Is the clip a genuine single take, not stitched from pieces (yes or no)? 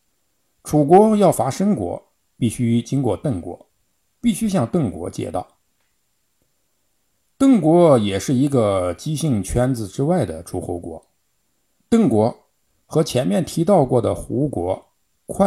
yes